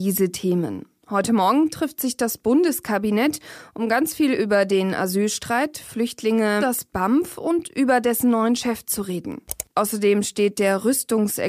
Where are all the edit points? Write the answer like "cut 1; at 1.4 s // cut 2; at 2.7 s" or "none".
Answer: cut 1; at 6.6 s